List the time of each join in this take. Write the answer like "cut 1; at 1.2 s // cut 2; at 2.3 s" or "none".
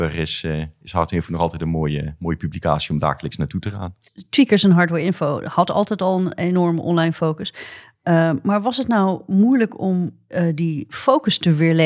none

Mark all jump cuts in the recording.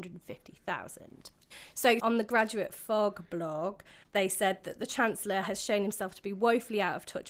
cut 1; at 2.0 s

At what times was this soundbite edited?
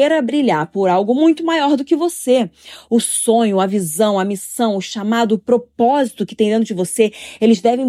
none

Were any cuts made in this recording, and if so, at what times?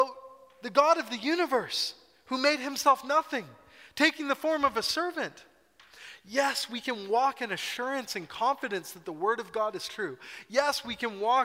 none

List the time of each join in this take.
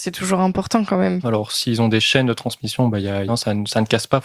cut 1; at 1.2 s // cut 2; at 3.3 s

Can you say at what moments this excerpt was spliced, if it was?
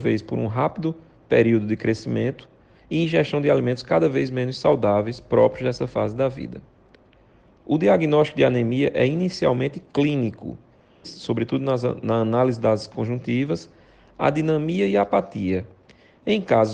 cut 1; at 11.0 s

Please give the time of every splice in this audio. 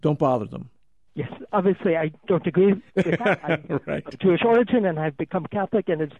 cut 1; at 1.1 s

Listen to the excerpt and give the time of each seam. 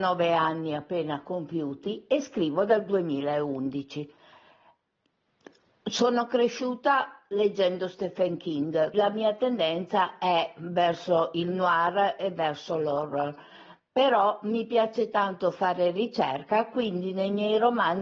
cut 1; at 8.9 s

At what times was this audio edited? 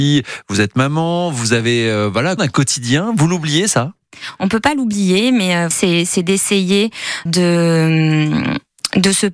cut 1; at 2.4 s // cut 2; at 5.7 s // cut 3; at 7.3 s

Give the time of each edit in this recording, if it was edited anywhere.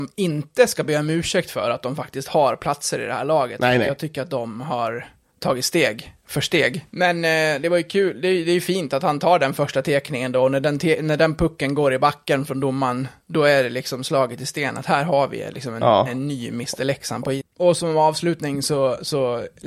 cut 1; at 6.9 s // cut 2; at 17.4 s

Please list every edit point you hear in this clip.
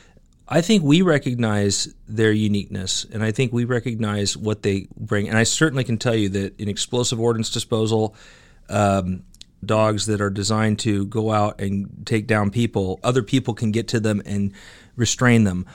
cut 1; at 9.6 s // cut 2; at 13.0 s

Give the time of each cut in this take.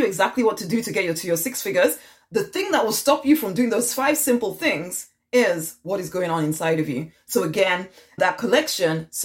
cut 1; at 8.2 s

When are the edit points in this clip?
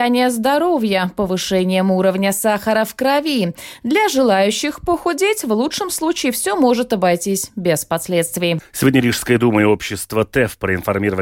cut 1; at 8.6 s

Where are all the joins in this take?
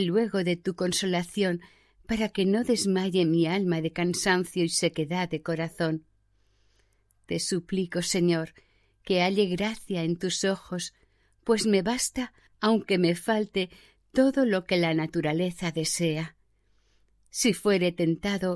none

